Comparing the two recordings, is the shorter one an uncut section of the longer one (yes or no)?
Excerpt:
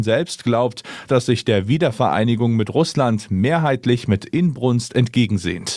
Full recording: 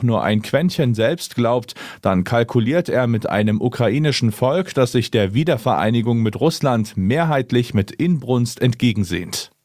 no